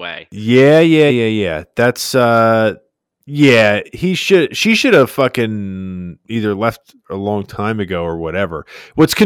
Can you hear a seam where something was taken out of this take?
yes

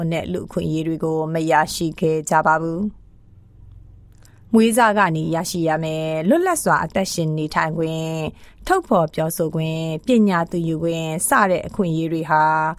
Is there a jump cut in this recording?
no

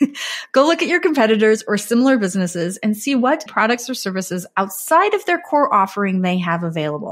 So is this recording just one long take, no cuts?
no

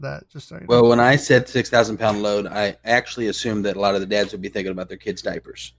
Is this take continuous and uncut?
yes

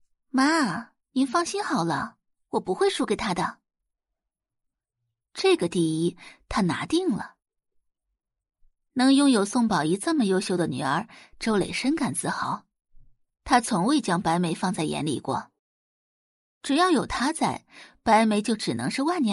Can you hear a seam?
yes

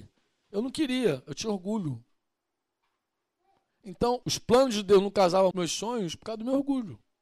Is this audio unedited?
no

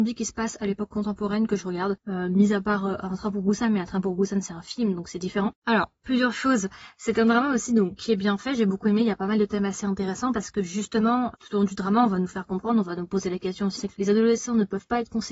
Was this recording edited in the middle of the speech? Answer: yes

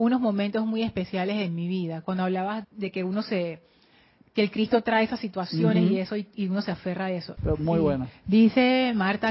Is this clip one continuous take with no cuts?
no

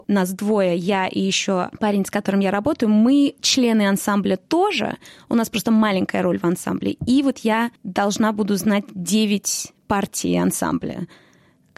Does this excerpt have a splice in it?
no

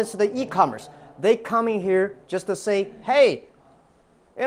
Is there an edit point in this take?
no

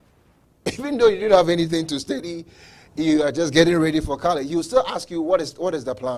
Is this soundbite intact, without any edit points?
yes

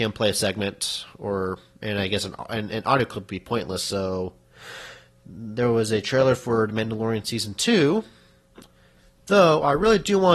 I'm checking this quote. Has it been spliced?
yes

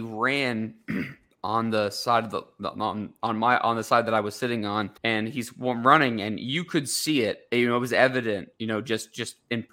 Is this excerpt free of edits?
no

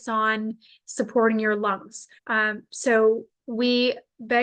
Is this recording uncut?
no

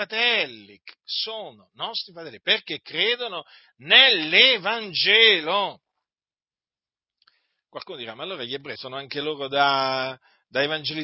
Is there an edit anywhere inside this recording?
yes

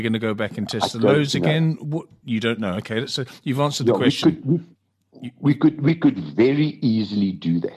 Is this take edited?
no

